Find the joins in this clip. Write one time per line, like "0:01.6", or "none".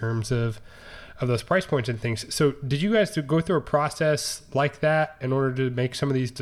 none